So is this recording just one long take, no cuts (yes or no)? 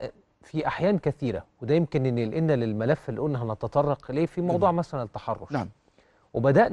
yes